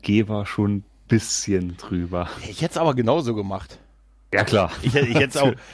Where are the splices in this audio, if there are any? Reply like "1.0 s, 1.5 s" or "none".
none